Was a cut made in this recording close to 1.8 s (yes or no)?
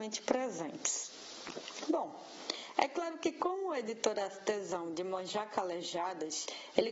yes